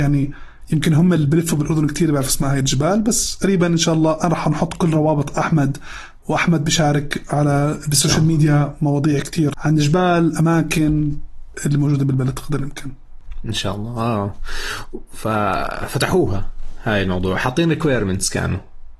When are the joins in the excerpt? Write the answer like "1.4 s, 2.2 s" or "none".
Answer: 9.5 s